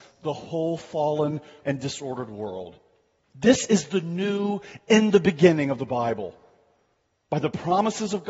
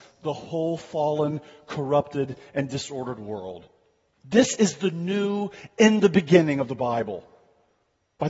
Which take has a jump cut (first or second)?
first